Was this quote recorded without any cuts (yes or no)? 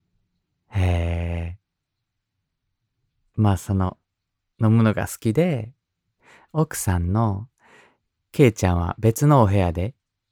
yes